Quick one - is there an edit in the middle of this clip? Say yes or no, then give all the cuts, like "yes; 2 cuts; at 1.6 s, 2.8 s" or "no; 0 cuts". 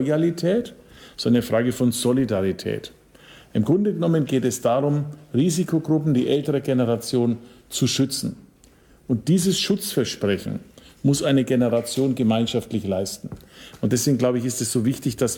no; 0 cuts